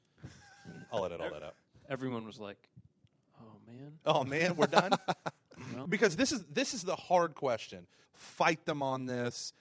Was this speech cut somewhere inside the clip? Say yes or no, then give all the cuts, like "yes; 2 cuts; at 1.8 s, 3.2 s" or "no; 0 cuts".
yes; 2 cuts; at 5.9 s, 8.1 s